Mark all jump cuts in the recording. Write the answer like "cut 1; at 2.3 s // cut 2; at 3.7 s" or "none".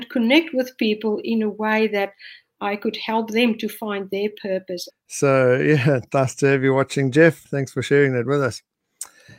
cut 1; at 4.9 s // cut 2; at 7.4 s